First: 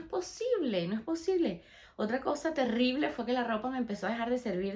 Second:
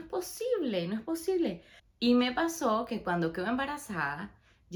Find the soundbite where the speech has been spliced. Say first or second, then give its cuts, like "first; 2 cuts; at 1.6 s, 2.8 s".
second; 1 cut; at 1.8 s